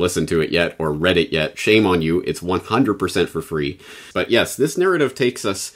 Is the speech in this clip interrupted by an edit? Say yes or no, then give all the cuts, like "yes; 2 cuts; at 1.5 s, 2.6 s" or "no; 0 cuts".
yes; 1 cut; at 4.1 s